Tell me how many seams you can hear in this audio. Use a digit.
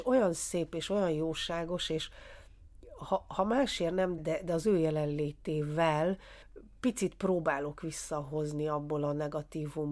1